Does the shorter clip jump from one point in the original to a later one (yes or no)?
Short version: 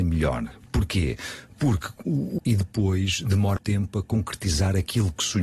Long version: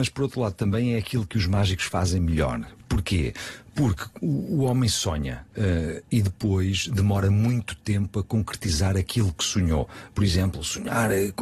yes